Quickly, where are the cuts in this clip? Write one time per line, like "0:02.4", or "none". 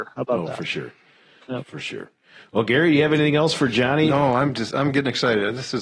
none

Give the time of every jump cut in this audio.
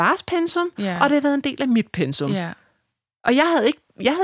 none

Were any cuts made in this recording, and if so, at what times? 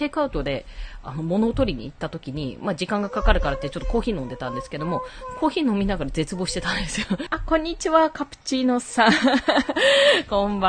0:07.3

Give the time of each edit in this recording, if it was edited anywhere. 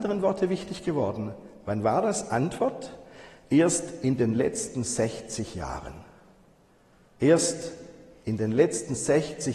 none

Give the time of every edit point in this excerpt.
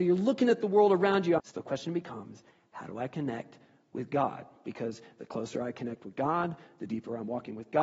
0:01.4

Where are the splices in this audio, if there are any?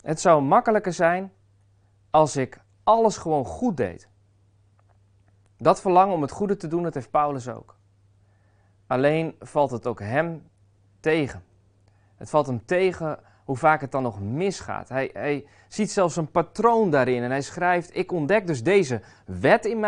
none

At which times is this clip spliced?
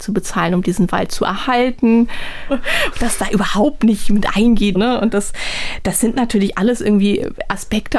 0:02.5
0:04.7

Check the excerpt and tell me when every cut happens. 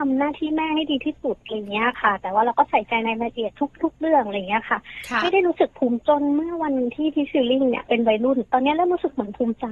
0:06.0

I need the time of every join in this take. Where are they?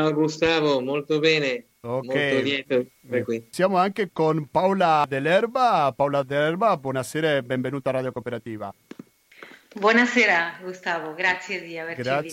none

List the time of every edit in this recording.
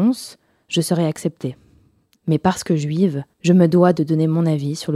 0:02.1
0:03.3

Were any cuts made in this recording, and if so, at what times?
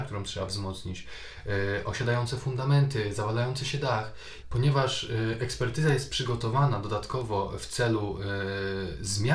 0:04.4

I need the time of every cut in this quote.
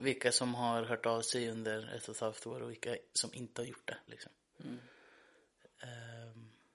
0:04.1

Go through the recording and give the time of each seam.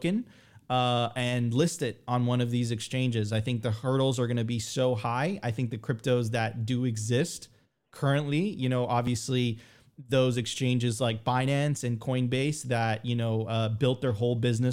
none

